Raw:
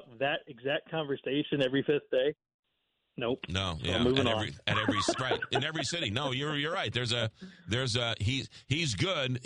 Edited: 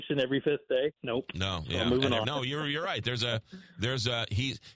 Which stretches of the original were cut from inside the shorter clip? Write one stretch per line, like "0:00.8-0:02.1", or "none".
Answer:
0:02.4-0:03.1
0:04.4-0:06.1